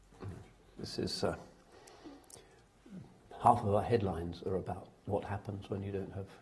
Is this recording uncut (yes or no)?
yes